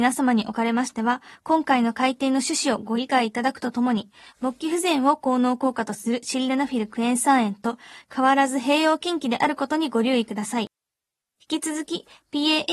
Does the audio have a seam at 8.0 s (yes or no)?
yes